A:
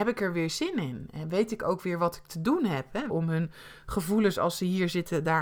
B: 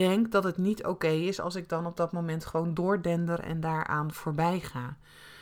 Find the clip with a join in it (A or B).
A